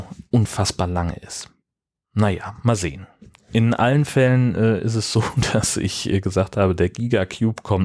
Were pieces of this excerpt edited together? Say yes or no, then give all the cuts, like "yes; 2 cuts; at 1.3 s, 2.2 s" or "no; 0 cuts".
no; 0 cuts